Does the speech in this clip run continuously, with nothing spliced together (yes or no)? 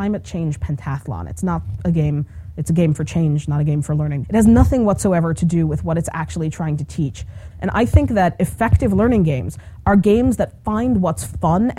no